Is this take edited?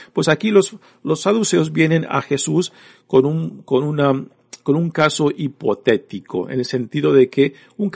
no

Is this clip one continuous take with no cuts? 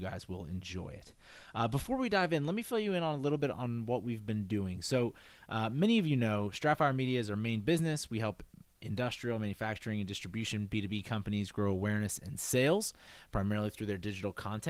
yes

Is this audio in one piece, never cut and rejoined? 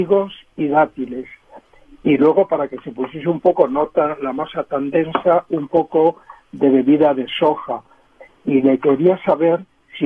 yes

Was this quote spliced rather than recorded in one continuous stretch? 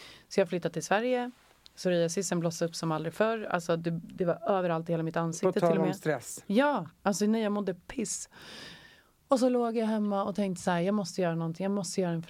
no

